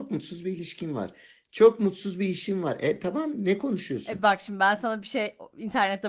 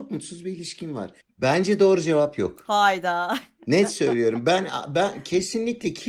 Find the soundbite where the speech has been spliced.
second; 1 cut; at 1.2 s

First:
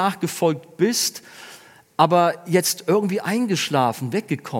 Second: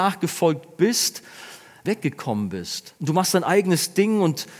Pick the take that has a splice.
second; 2 cuts; at 1.8 s, 3.0 s

